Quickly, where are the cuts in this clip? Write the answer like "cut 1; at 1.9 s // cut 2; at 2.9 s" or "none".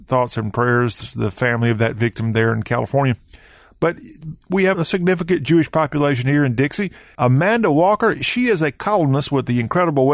cut 1; at 4.7 s // cut 2; at 7.1 s

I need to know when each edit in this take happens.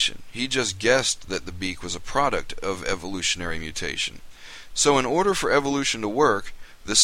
cut 1; at 4.7 s

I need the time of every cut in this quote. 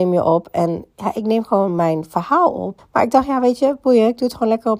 cut 1; at 2.8 s

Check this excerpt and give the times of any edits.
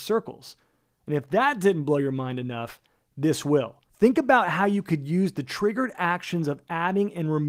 cut 1; at 3.9 s

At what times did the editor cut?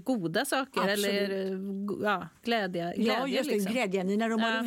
none

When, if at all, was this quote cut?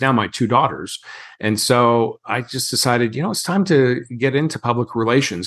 none

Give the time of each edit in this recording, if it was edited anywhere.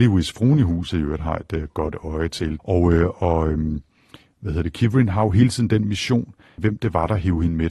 cut 1; at 2.6 s // cut 2; at 6.6 s

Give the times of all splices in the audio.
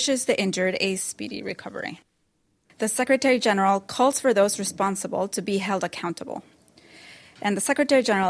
cut 1; at 2.7 s

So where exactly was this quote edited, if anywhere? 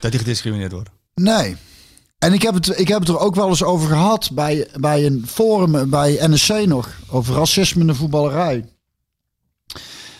none

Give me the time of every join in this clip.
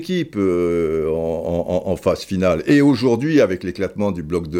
none

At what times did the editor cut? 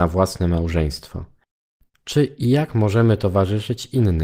cut 1; at 1.9 s

